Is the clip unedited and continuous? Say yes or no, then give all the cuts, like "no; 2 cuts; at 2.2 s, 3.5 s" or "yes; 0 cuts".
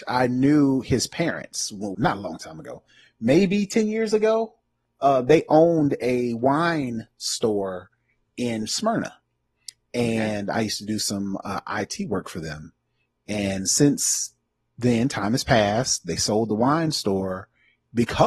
no; 1 cut; at 1.9 s